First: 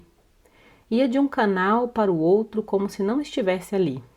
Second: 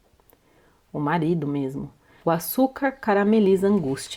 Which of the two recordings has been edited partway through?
second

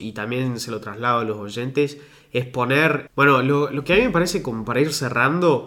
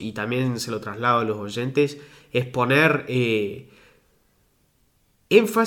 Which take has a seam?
first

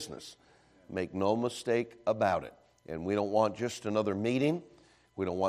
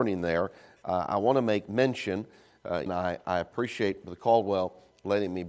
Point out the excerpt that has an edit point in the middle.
second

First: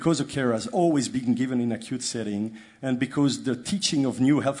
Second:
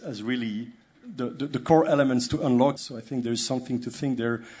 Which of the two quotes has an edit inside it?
second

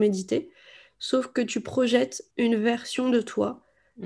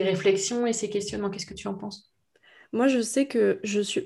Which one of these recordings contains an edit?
first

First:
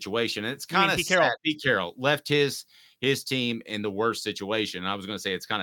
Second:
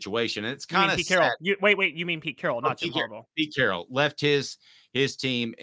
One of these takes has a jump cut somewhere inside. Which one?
first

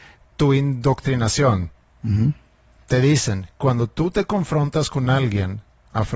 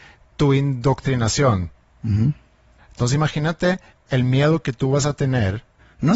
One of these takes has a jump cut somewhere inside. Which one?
second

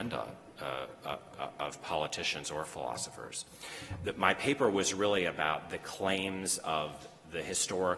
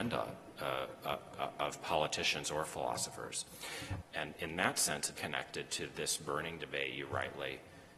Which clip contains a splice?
second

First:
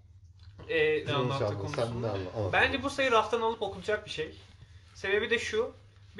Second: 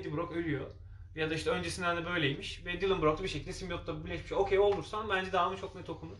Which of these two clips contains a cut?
first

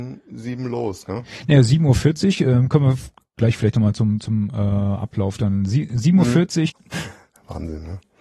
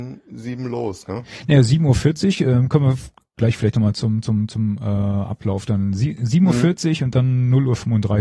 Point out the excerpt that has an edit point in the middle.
first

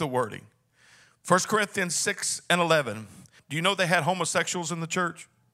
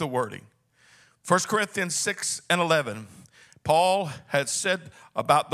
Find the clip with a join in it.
first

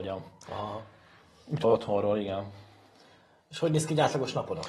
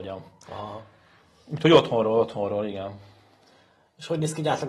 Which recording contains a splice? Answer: first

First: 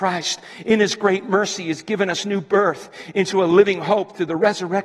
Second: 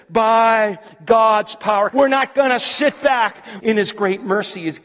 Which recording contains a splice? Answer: second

